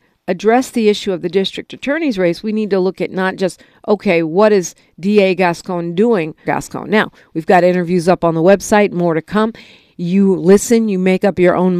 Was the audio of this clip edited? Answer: yes; 1 cut; at 6.4 s

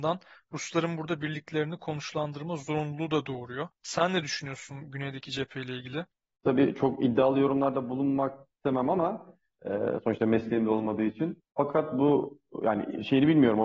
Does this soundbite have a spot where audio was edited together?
no; 0 cuts

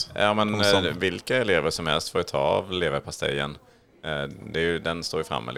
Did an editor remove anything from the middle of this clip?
no; 0 cuts

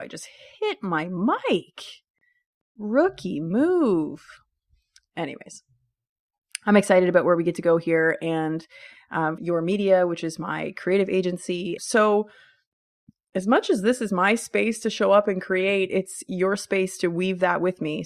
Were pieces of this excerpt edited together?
yes; 2 cuts; at 9.4 s, 11.8 s

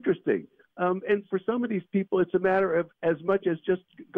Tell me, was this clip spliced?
yes; 2 cuts; at 1.3 s, 3.0 s

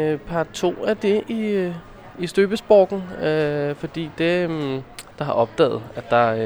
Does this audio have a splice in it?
yes; 1 cut; at 5.1 s

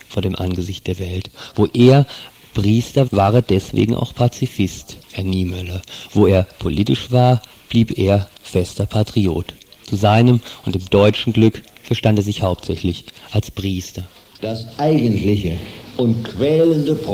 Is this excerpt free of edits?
no; 2 cuts; at 3.1 s, 5.0 s

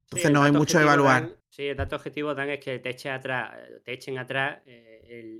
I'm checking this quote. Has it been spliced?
yes; 1 cut; at 1.4 s

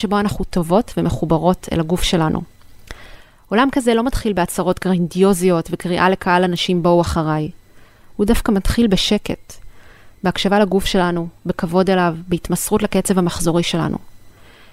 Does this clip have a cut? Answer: no; 0 cuts

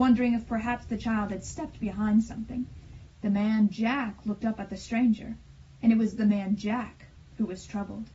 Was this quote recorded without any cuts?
no; 1 cut; at 3.1 s

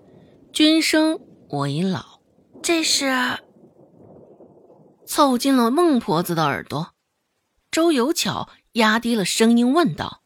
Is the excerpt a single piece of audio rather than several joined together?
no; 1 cut; at 2.5 s

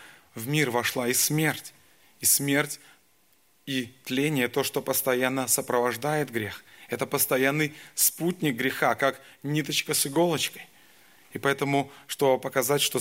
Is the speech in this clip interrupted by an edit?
no; 0 cuts

